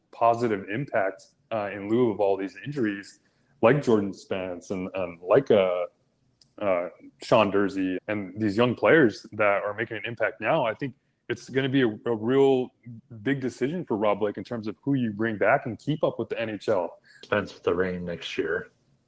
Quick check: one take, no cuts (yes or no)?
no